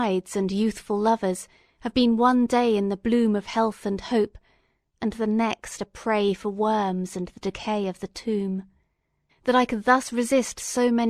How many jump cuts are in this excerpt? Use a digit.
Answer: 1